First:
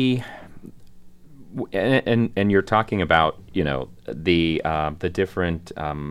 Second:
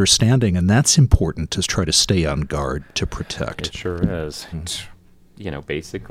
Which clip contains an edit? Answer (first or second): second